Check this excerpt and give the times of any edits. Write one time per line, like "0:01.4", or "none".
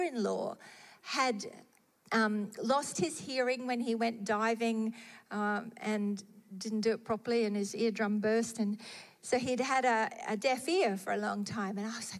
none